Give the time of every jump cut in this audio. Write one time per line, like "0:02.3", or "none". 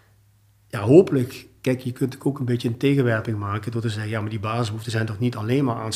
none